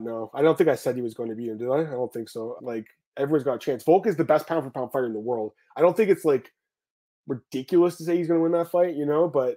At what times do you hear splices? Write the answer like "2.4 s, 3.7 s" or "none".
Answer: 2.6 s